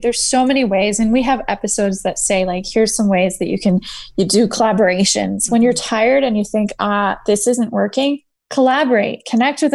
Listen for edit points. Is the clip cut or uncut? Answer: uncut